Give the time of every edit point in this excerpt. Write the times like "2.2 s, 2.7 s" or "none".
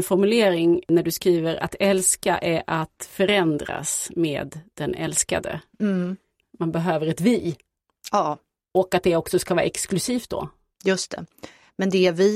none

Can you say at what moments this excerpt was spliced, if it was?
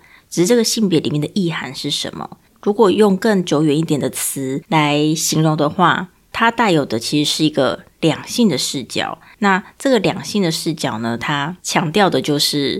2.5 s

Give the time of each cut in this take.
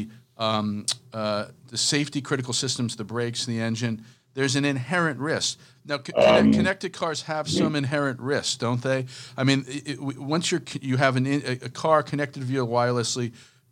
5.7 s

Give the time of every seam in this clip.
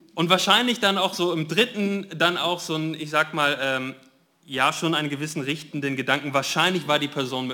none

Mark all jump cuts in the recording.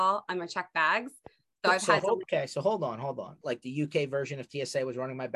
2.2 s, 3.4 s

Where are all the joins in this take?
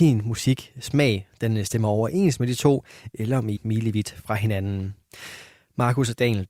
3.6 s

